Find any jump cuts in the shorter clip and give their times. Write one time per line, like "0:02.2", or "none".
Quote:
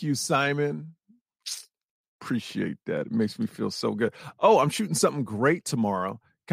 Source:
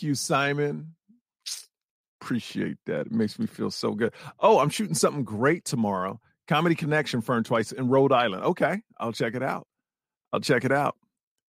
none

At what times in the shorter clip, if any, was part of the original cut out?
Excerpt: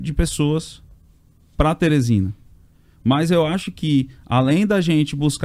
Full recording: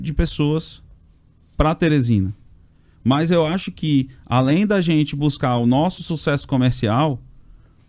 none

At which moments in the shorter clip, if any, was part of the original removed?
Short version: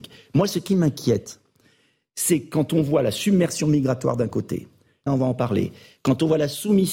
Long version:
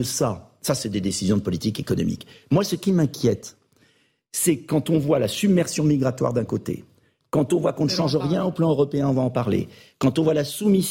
0:05.1

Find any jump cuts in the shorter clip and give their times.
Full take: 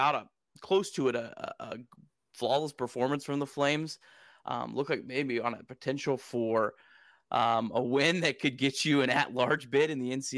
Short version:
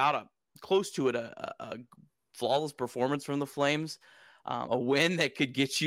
0:04.7

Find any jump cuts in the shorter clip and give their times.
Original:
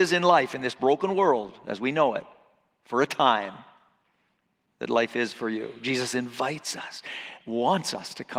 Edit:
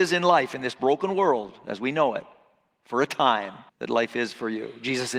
0:03.7

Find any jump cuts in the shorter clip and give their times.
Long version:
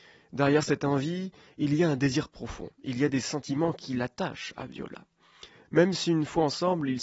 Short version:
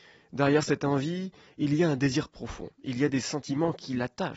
none

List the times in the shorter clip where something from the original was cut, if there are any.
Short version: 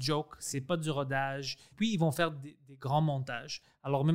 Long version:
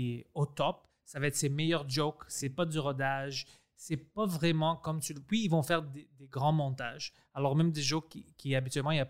0:01.7

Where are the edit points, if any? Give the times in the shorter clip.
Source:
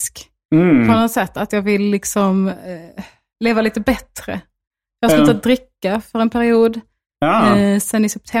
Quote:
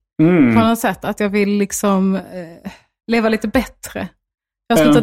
none

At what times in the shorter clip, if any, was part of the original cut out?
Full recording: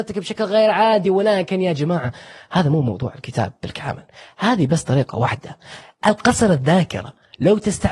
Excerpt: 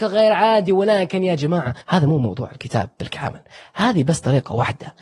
0:01.8

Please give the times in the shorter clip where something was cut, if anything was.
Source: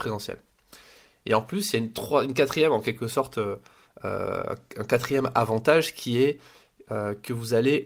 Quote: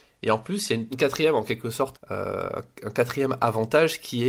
0:00.9
0:01.9

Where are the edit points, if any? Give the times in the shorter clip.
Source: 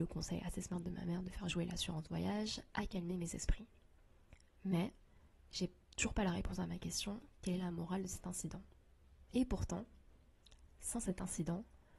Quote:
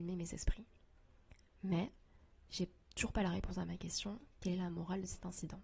none

